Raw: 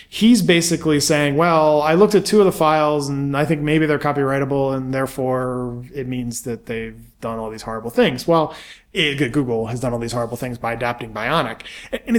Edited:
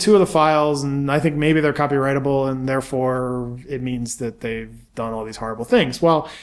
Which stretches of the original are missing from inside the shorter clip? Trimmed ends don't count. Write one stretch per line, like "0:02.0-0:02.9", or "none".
none